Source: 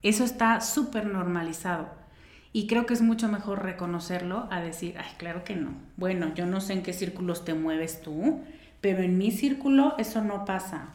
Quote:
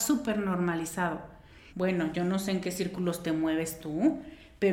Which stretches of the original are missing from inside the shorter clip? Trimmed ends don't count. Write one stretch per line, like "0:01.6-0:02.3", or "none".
0:02.4-0:05.9